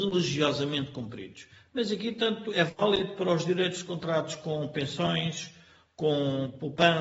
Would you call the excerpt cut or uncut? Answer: uncut